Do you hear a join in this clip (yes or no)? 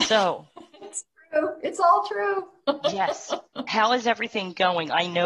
no